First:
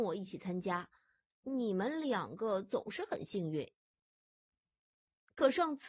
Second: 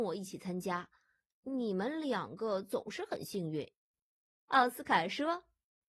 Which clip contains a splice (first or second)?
second